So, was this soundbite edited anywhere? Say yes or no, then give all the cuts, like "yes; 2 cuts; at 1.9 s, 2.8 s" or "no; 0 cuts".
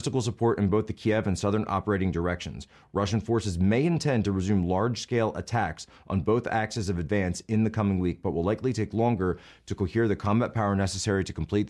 no; 0 cuts